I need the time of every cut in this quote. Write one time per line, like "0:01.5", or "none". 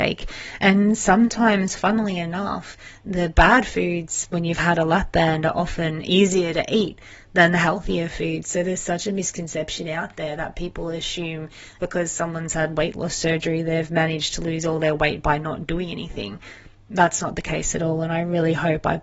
0:11.8

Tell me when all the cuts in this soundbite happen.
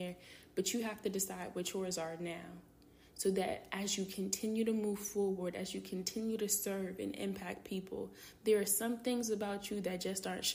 none

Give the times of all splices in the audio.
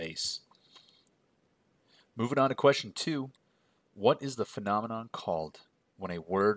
none

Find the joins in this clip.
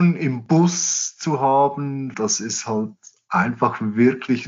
0:02.1

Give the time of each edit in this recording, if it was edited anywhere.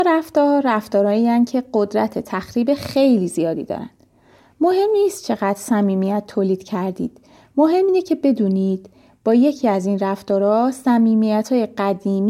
none

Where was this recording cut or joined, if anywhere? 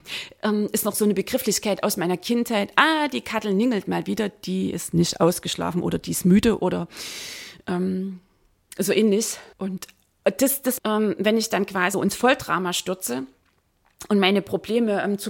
0:09.5
0:10.8
0:11.9

